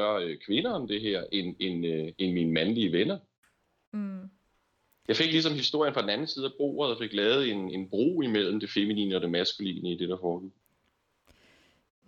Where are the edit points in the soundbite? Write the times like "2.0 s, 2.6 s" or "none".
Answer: none